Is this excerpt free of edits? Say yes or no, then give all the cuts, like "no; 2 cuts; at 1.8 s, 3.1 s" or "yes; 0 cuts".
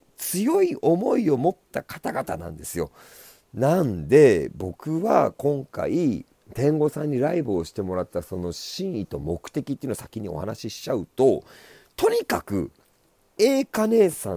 yes; 0 cuts